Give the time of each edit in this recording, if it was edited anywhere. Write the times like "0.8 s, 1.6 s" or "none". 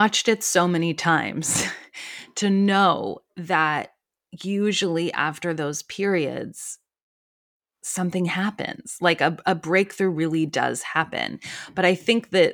none